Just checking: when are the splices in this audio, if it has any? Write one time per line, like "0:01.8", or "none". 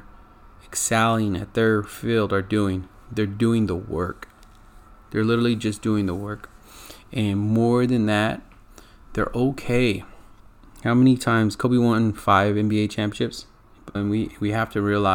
0:14.0